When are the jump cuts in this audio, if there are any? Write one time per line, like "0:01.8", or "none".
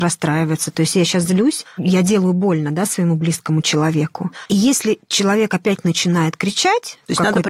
0:04.5